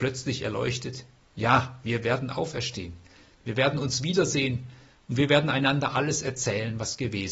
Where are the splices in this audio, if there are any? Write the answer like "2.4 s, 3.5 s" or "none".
3.3 s